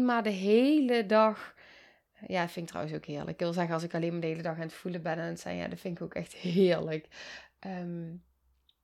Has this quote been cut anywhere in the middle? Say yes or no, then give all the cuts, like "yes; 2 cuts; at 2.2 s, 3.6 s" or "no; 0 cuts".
no; 0 cuts